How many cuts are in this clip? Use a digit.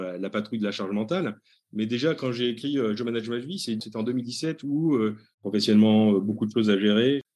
1